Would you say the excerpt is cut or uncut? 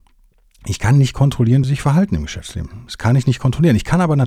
cut